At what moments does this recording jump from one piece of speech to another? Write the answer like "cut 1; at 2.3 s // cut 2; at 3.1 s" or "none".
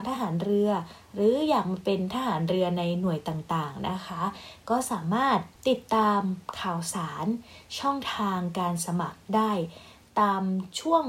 cut 1; at 5.6 s